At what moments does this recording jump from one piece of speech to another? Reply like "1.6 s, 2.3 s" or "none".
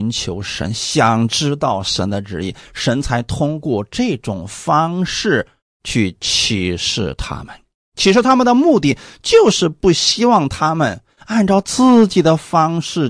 none